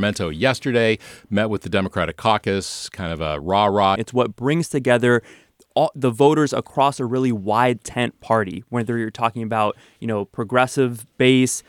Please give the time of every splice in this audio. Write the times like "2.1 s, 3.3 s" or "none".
4.0 s